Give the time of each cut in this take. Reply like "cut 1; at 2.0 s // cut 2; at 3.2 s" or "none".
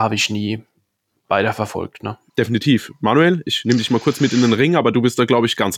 cut 1; at 2.3 s